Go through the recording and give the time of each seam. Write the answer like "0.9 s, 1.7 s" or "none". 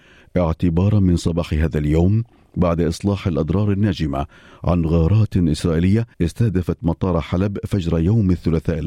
6.1 s

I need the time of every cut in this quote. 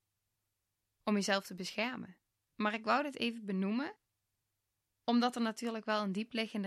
2.5 s

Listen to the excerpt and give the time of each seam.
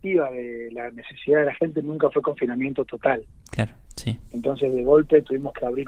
3.9 s

